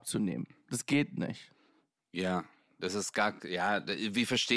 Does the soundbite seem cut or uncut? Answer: uncut